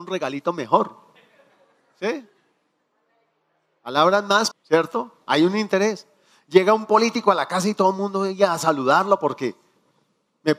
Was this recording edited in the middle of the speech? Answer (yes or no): yes